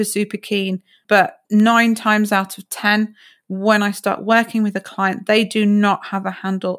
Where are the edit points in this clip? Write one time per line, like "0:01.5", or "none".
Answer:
0:01.4

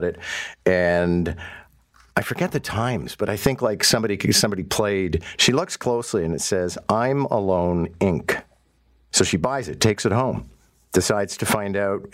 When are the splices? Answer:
0:05.4

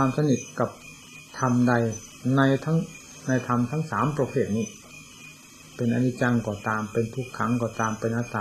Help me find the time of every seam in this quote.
0:01.3

